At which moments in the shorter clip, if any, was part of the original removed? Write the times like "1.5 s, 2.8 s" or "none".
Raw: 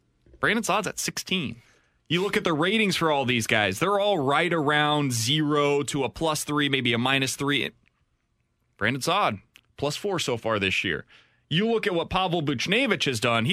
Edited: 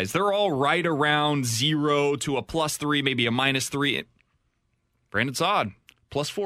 none